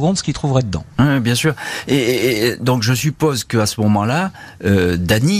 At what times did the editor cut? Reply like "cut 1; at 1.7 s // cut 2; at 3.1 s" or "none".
none